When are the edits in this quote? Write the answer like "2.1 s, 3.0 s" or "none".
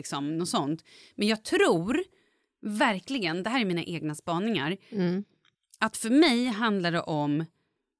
none